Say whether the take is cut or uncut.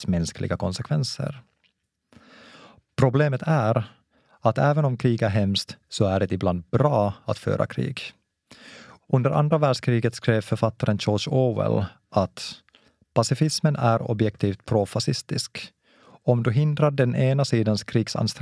uncut